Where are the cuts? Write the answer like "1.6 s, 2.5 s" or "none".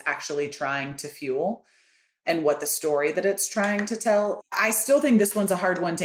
4.4 s